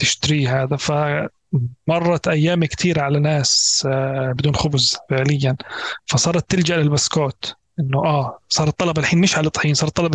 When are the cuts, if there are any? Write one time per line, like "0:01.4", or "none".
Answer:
0:04.4